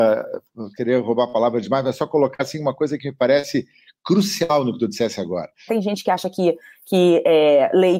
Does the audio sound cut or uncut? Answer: cut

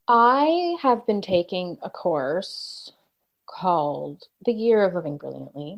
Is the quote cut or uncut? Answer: uncut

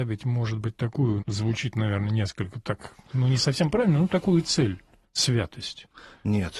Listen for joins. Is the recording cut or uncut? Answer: cut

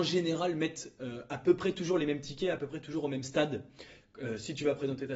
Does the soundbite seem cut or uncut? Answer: cut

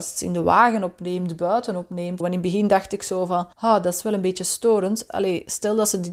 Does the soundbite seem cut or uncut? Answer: cut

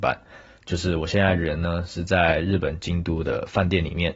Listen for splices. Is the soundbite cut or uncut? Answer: uncut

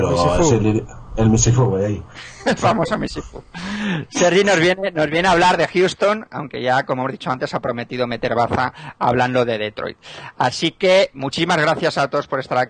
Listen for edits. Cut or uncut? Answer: uncut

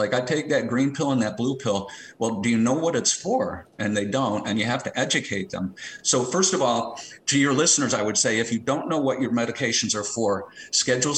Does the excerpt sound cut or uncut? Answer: uncut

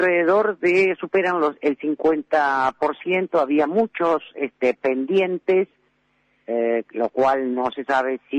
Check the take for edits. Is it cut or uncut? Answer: uncut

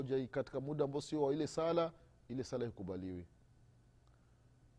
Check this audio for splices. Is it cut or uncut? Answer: uncut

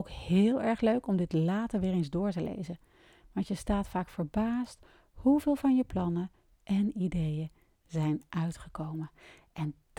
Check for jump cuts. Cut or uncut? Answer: uncut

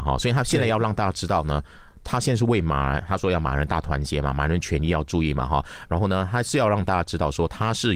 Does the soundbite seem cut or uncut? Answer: uncut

